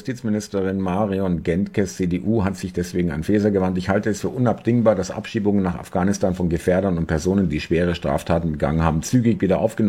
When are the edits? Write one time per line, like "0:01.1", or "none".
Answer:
none